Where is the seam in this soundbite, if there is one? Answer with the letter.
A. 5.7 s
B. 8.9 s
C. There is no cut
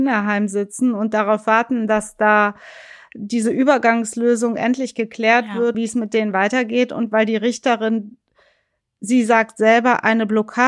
A